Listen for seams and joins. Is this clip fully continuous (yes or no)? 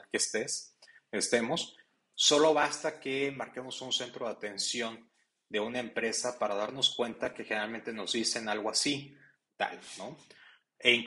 no